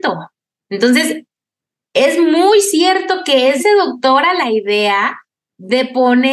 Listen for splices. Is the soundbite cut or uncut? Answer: cut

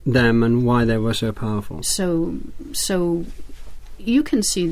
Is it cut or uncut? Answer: cut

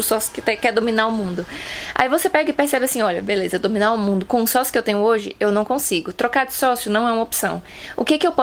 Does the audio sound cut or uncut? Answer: uncut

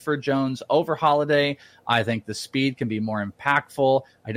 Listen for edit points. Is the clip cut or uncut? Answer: uncut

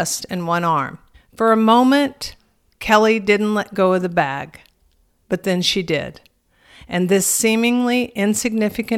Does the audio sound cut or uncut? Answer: cut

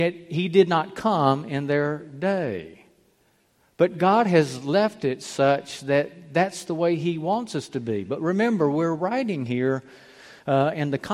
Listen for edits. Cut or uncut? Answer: uncut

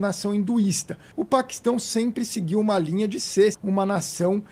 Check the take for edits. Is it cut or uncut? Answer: cut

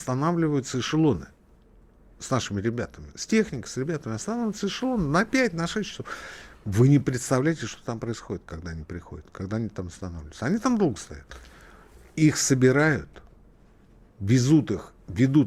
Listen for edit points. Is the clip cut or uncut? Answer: uncut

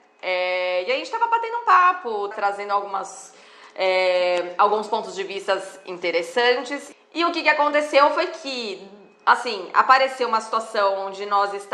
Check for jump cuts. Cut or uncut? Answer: cut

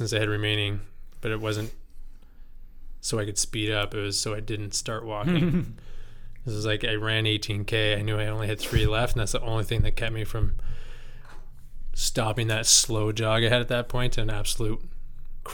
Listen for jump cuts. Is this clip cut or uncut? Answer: uncut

